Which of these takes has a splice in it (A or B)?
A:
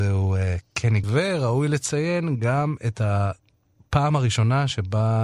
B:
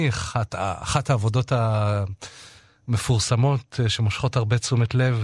A